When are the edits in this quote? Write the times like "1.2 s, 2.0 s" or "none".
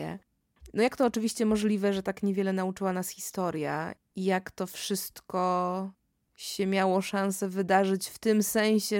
4.0 s